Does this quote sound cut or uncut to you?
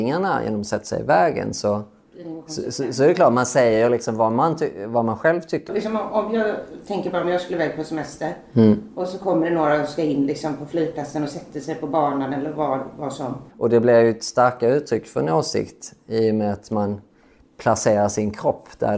cut